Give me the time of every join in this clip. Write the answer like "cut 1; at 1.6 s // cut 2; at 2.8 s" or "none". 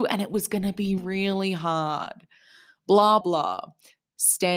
cut 1; at 1.0 s // cut 2; at 3.2 s